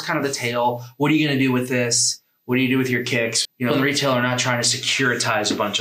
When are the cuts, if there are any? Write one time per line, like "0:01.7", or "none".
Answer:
0:03.4